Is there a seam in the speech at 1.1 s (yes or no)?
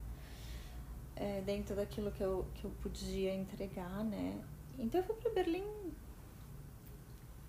no